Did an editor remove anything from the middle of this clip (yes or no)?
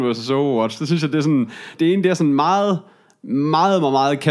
yes